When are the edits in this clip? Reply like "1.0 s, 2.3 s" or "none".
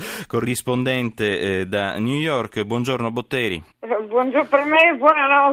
3.7 s